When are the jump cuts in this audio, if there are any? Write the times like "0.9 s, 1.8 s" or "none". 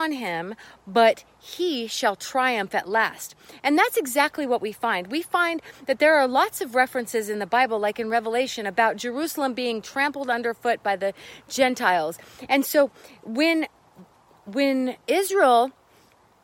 12.5 s